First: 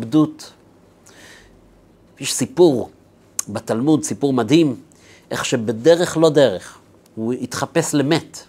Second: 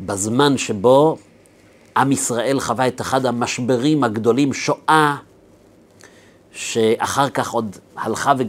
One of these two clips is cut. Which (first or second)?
first